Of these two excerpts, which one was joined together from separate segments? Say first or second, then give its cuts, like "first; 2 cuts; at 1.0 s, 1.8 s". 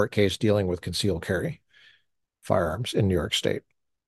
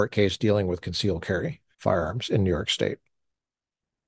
second; 1 cut; at 1.7 s